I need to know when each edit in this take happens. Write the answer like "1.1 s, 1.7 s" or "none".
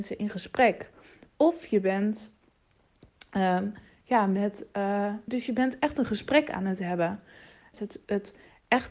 5.3 s, 7.7 s